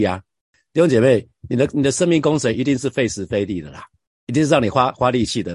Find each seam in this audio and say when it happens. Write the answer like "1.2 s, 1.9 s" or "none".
none